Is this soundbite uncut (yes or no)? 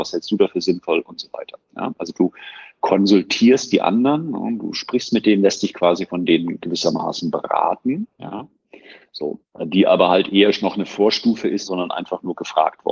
no